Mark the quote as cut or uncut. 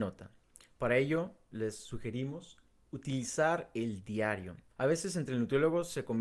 cut